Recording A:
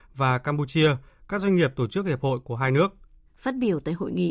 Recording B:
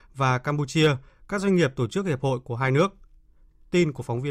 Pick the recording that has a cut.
A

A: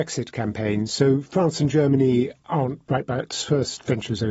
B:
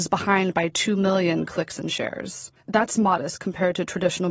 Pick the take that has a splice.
B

